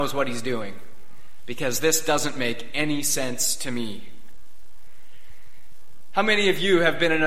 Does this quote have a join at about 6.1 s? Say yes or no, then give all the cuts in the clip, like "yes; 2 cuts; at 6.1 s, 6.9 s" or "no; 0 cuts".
no; 0 cuts